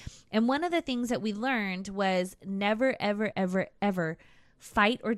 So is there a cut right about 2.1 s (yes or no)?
no